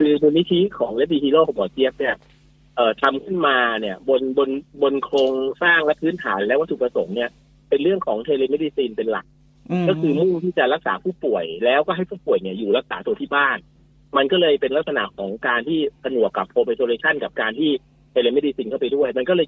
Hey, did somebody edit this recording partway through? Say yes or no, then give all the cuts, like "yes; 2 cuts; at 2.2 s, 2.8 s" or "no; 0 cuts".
no; 0 cuts